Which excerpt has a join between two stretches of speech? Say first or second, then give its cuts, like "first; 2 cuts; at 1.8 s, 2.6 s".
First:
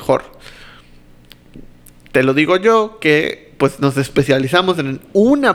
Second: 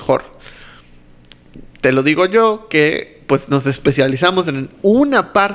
second; 1 cut; at 1.7 s